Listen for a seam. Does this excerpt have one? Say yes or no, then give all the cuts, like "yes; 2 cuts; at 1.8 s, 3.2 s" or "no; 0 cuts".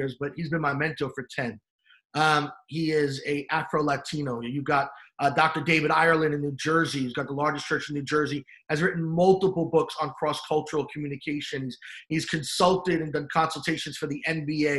no; 0 cuts